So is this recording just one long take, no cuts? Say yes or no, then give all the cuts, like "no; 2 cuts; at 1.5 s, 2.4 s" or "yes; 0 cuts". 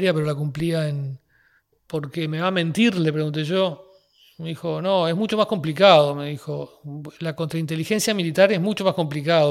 no; 1 cut; at 1.7 s